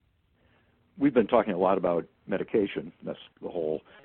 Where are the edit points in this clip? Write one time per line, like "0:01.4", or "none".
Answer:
none